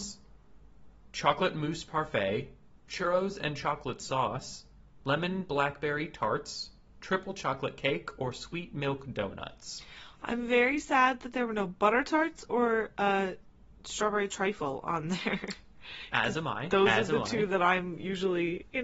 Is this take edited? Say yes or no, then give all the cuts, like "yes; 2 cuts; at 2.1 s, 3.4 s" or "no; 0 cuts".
no; 0 cuts